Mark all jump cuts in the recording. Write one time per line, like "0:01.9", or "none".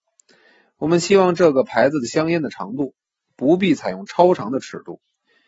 none